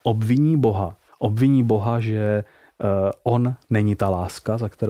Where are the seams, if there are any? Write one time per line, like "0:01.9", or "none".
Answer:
0:01.1